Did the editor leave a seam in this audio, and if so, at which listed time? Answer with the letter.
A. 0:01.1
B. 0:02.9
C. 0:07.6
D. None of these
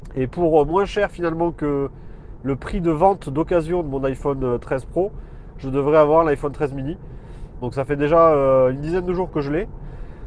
C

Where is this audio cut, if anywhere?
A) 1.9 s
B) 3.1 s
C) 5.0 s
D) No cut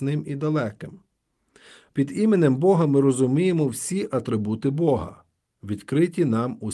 A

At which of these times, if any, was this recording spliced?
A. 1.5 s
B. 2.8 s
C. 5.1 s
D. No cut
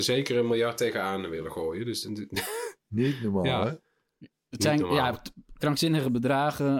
B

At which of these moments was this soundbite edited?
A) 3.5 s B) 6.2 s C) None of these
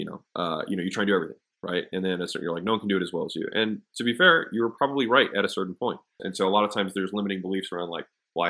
B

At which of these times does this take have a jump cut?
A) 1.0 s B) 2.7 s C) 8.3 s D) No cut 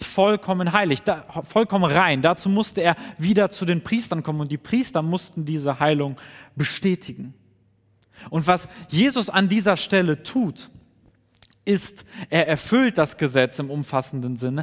D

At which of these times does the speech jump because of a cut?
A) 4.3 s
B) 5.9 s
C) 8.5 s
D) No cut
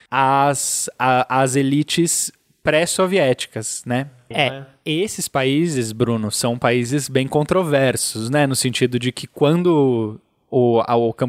A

